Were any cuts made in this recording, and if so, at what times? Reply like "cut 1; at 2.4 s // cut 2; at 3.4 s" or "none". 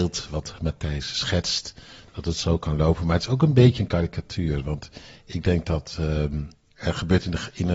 none